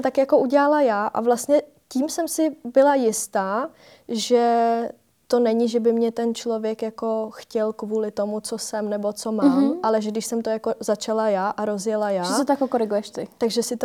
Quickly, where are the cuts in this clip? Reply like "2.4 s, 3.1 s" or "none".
none